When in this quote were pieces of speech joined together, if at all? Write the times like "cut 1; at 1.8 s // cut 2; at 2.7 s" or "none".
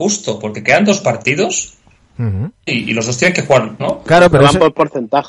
cut 1; at 2.7 s // cut 2; at 3.8 s